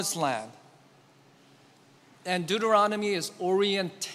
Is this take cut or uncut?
uncut